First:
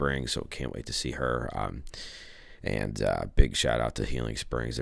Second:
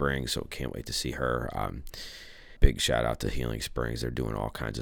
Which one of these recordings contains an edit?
second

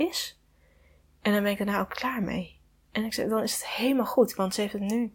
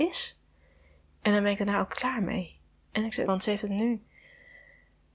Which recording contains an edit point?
second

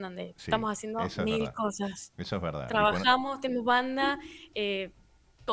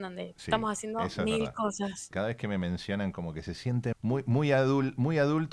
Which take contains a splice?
second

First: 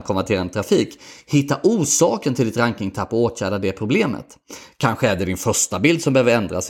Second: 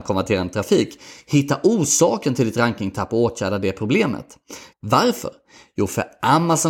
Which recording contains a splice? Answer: second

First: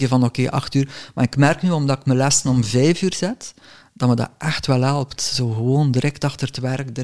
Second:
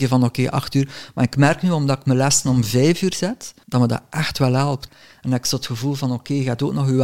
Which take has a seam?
second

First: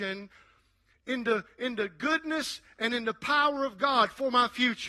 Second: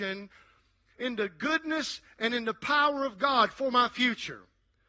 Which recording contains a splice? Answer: second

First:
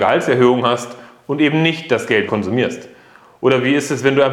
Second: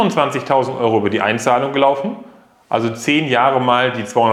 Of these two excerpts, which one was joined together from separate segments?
first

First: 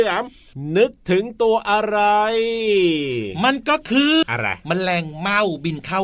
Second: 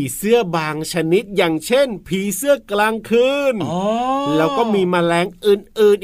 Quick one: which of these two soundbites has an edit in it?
first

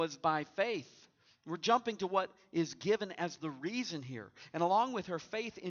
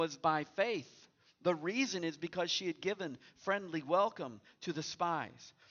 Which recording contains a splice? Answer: first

